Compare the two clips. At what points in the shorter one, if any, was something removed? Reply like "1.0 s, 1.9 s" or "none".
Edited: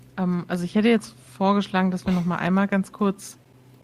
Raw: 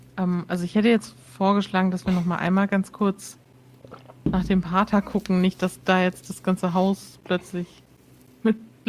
none